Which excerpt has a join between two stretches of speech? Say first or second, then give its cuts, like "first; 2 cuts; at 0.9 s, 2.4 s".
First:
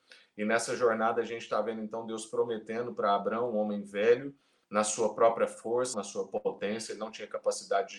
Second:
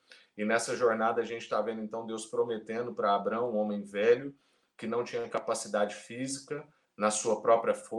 first; 2 cuts; at 4.6 s, 5.9 s